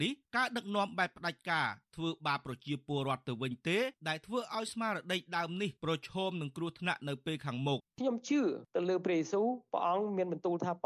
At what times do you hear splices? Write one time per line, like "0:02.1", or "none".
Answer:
0:07.8